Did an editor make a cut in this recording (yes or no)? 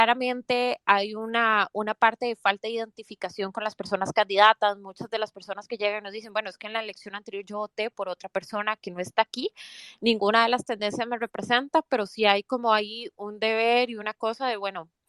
no